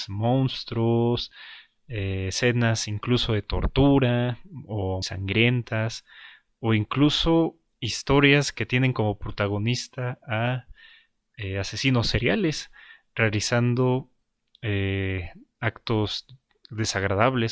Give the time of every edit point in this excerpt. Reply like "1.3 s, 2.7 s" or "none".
5.0 s

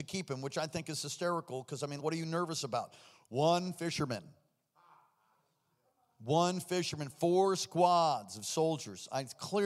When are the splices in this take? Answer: 2.0 s

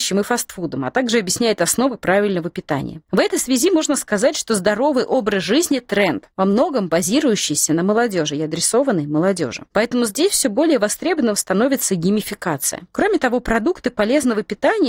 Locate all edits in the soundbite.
none

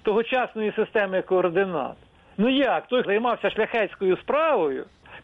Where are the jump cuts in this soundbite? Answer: 3.0 s

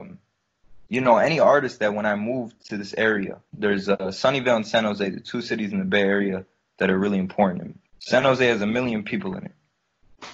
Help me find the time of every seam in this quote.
3.5 s, 7.8 s

